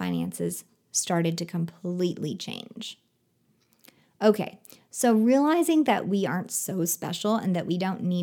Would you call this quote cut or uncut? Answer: uncut